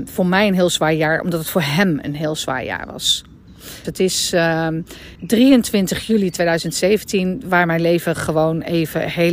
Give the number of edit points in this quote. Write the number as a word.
two